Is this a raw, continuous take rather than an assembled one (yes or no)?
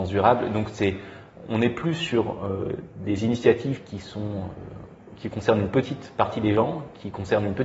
yes